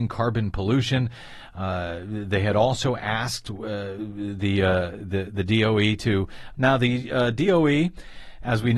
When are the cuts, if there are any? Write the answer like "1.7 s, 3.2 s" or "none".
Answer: 6.5 s